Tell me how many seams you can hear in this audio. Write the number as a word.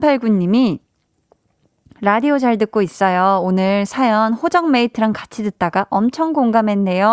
zero